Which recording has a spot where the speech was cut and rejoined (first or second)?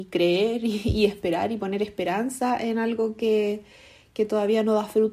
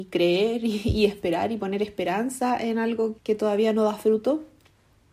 second